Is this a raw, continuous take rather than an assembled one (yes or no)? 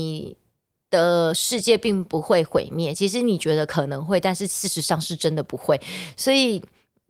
yes